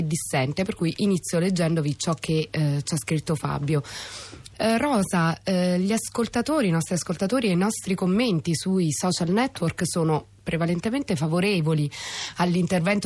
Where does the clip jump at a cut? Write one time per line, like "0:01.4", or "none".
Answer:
0:04.5